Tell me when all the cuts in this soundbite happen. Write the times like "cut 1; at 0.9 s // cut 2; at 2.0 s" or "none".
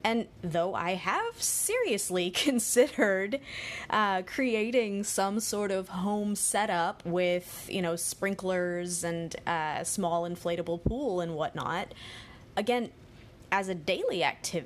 none